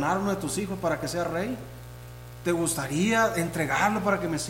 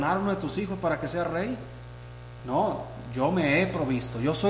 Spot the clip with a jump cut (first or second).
second